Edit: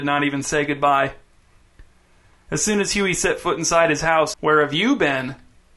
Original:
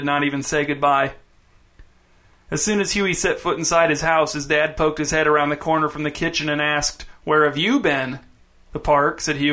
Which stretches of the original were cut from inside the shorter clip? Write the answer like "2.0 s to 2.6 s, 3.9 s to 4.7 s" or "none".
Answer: 4.3 s to 7.2 s